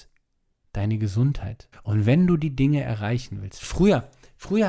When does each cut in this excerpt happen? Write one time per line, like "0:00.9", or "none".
0:01.7

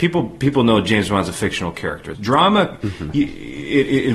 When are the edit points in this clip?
0:02.1

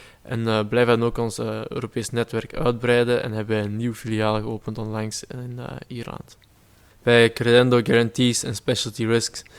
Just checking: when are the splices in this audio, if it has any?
0:06.9

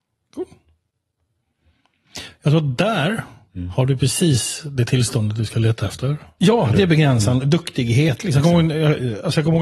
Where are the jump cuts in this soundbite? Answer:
0:06.4

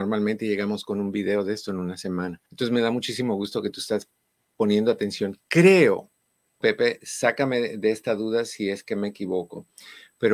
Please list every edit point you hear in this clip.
0:02.5
0:06.6

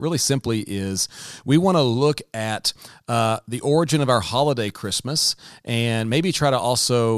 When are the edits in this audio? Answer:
none

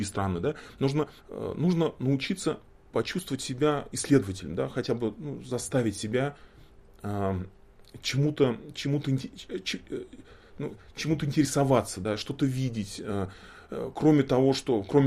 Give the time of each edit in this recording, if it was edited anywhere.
0:01.2

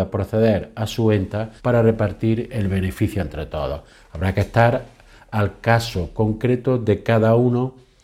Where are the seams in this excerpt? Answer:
0:01.6

